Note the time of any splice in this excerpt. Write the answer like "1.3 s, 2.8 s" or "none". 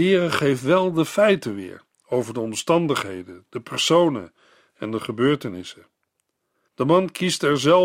6.7 s

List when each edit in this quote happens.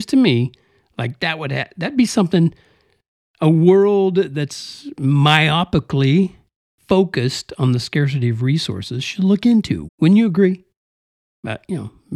9.9 s

